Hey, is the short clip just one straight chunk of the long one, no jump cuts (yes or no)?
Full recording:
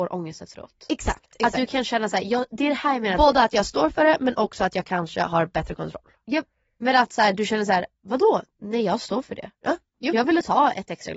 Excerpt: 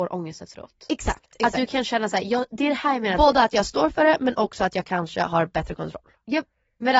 yes